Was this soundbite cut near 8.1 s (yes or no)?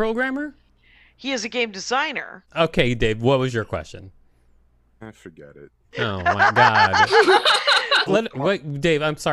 yes